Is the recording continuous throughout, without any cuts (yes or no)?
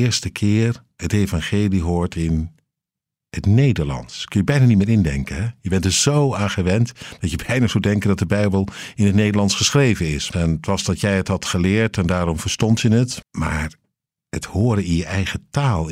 no